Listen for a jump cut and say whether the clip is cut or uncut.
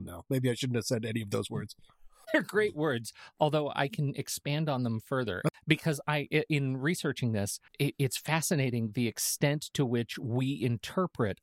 cut